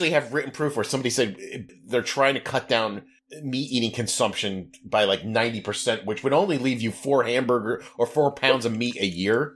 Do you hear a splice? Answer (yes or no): no